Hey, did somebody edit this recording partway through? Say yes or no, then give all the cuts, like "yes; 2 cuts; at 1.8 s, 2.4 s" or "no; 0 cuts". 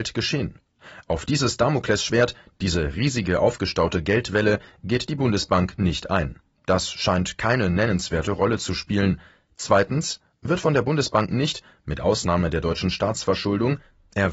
no; 0 cuts